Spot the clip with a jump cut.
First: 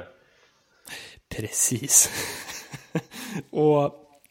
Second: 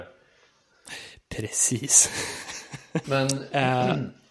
second; 1 cut; at 3.0 s

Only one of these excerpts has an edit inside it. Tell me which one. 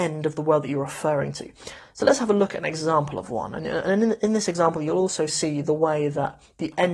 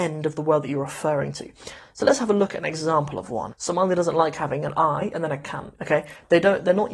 second; 2 cuts; at 3.5 s, 5.8 s

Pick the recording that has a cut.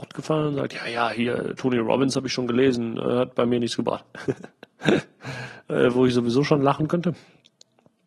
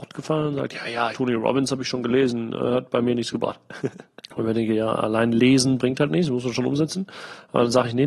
second; 2 cuts; at 1.1 s, 4.2 s

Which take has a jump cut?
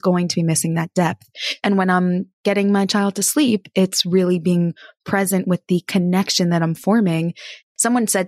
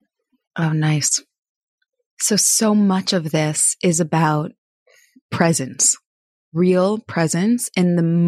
first; 1 cut; at 1.6 s

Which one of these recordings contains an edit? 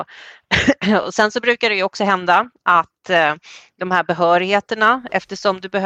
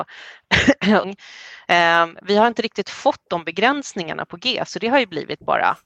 second; 1 cut; at 1.0 s

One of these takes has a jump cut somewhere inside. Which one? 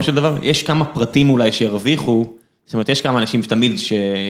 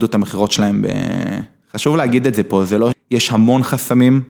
second; 2 cuts; at 1.6 s, 2.9 s

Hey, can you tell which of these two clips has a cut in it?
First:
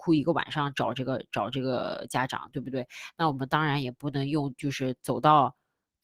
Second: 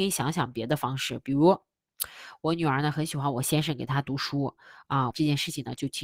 second; 1 cut; at 5.1 s

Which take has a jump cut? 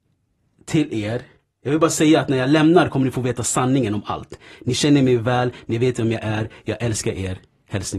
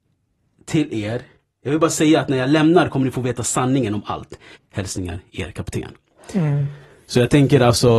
second; 1 cut; at 4.6 s

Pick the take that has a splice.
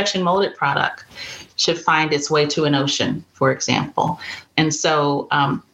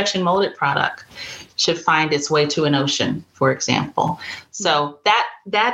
first; 1 cut; at 4.5 s

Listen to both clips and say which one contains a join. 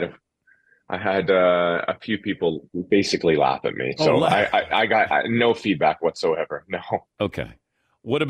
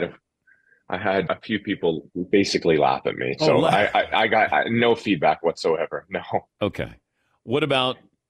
second; 1 cut; at 1.3 s

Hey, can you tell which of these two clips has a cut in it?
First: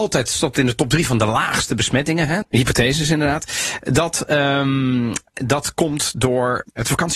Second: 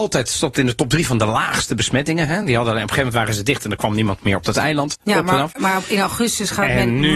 first; 1 cut; at 2.4 s

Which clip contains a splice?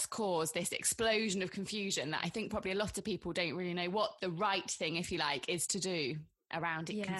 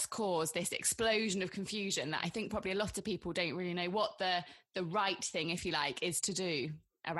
first; 1 cut; at 4.2 s

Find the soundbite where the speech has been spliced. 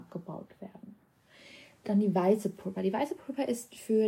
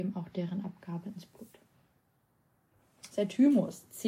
second; 1 cut; at 3.1 s

